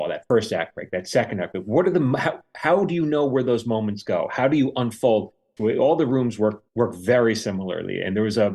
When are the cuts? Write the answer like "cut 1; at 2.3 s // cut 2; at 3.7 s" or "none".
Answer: cut 1; at 5.6 s // cut 2; at 6.7 s